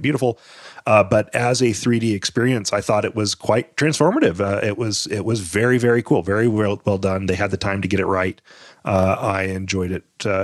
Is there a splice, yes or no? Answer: no